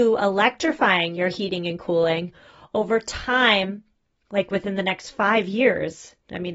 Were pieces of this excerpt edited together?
no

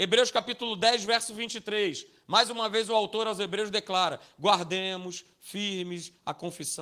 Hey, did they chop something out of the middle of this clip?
no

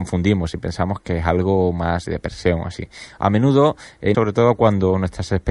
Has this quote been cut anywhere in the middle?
yes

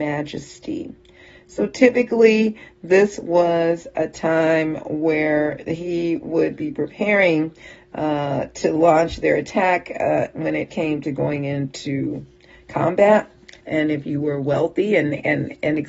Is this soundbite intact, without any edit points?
no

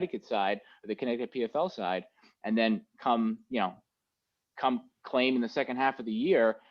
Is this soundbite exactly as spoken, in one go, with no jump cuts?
yes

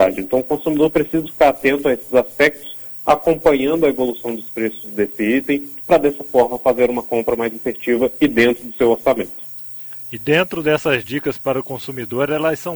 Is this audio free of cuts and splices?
no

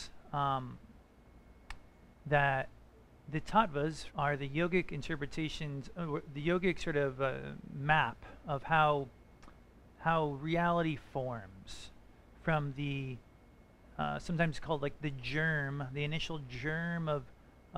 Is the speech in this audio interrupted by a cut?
yes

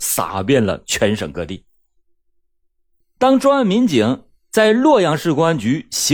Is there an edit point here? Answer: no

